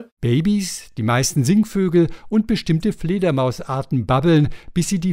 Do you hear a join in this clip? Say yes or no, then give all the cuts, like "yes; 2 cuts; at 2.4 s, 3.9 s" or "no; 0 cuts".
no; 0 cuts